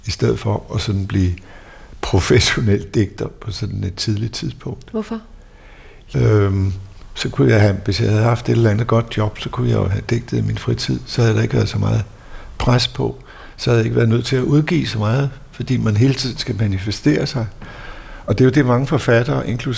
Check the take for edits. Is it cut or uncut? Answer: cut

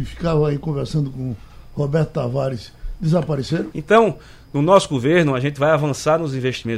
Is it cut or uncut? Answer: cut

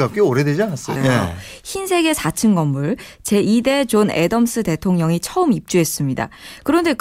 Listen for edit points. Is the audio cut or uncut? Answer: cut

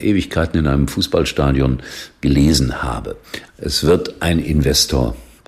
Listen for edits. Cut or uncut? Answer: cut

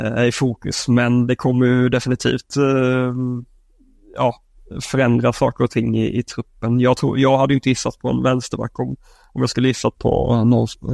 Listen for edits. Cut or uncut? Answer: uncut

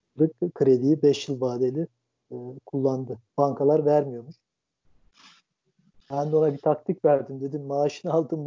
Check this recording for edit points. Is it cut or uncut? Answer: cut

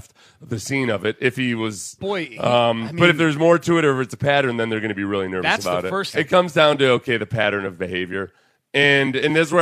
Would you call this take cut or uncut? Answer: cut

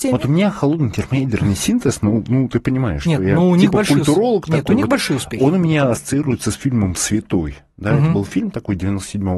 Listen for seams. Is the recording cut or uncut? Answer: uncut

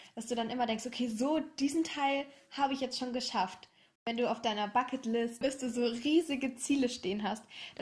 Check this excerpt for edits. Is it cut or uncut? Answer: cut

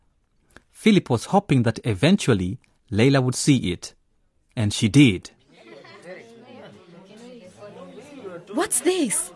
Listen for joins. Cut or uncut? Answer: uncut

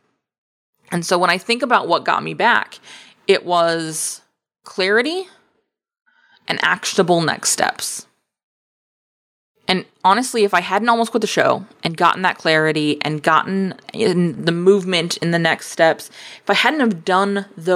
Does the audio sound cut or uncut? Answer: uncut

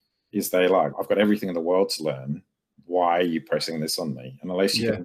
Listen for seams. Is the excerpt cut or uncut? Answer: cut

